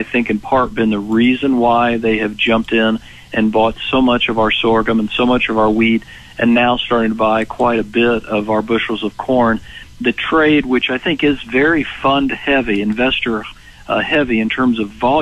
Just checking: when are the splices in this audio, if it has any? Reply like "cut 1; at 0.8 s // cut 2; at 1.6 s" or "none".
none

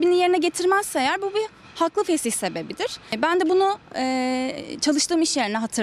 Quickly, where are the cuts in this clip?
none

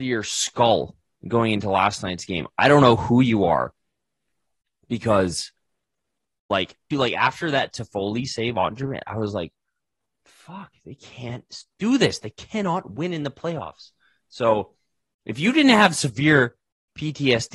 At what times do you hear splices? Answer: cut 1; at 6.9 s

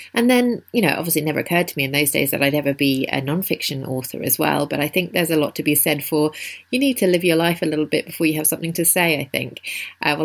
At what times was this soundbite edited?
none

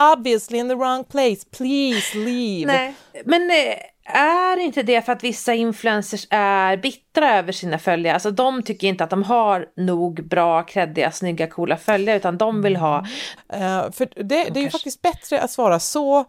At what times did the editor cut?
cut 1; at 13.4 s

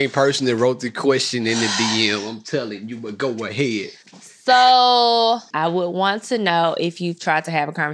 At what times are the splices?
cut 1; at 5.5 s

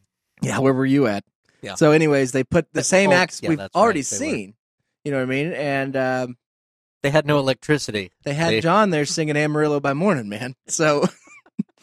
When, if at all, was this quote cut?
none

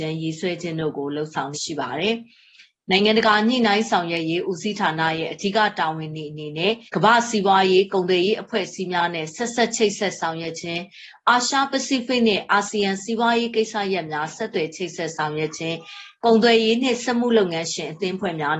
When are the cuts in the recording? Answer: cut 1; at 1.5 s // cut 2; at 6.9 s

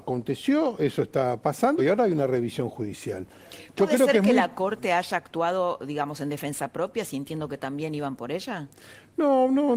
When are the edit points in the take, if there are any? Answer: cut 1; at 1.8 s

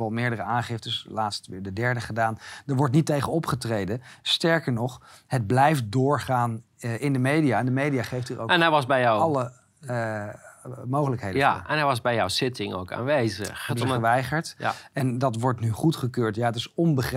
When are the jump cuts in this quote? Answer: cut 1; at 13.7 s

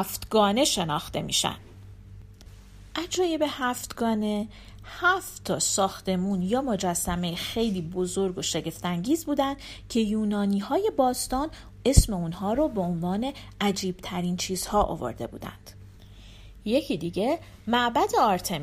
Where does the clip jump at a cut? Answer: cut 1; at 16.6 s

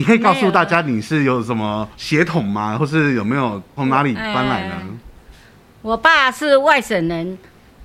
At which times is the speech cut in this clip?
none

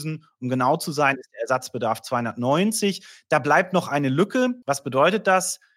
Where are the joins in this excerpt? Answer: cut 1; at 4.6 s

